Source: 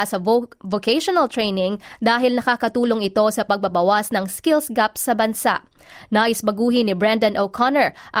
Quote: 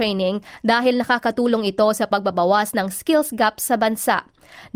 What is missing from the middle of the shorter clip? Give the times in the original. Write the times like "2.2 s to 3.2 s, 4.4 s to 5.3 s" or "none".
none